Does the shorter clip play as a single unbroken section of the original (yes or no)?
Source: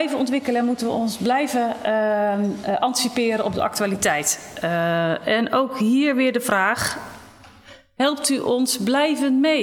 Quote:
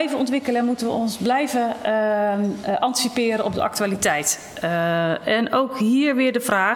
yes